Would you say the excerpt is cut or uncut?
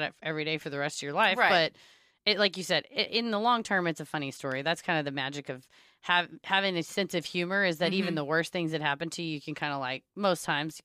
uncut